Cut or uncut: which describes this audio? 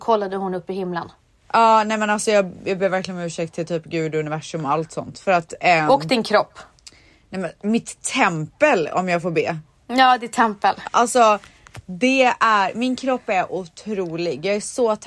cut